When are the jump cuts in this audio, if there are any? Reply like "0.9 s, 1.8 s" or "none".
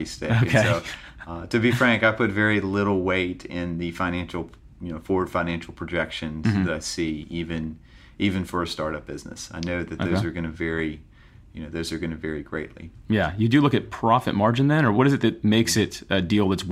none